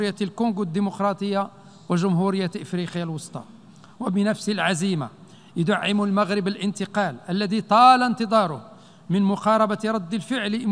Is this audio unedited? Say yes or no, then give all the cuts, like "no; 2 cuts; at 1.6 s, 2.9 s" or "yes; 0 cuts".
yes; 0 cuts